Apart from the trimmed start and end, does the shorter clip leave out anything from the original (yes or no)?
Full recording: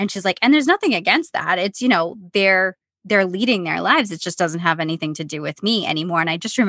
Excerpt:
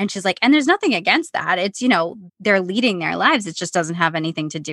yes